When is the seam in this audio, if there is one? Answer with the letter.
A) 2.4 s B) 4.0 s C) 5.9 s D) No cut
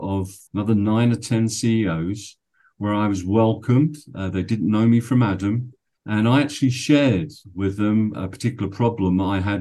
C